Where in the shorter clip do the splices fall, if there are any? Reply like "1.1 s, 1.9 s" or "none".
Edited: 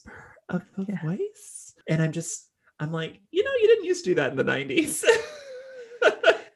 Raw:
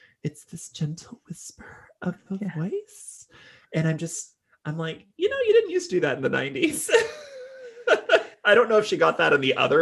1.8 s